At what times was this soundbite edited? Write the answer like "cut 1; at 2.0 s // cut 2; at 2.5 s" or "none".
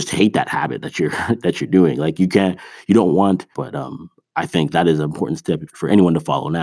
cut 1; at 3.5 s // cut 2; at 5.7 s